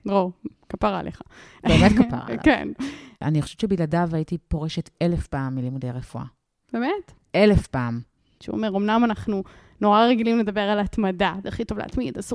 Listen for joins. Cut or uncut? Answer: cut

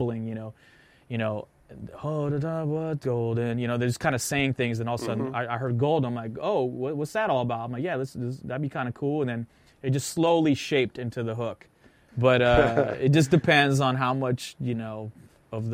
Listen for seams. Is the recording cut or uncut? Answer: cut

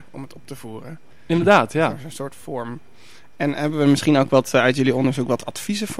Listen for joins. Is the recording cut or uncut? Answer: uncut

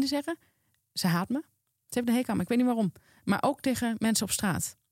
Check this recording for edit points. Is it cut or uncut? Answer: uncut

